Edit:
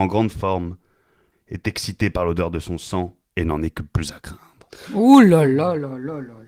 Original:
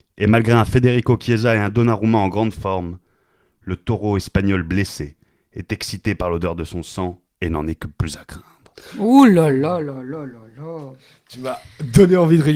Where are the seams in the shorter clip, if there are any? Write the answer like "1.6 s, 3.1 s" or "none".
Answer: 1.3 s